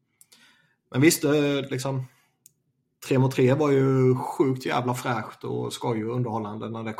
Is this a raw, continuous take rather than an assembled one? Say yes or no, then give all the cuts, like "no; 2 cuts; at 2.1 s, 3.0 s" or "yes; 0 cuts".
yes; 0 cuts